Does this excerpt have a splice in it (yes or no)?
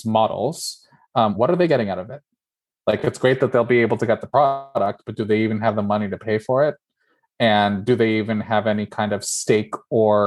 no